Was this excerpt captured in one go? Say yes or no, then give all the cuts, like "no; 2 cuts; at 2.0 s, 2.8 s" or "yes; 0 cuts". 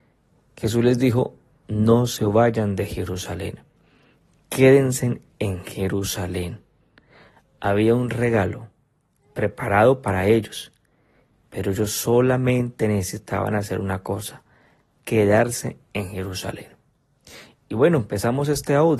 yes; 0 cuts